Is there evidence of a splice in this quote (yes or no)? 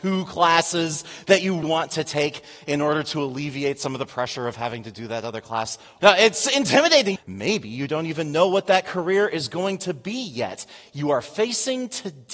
yes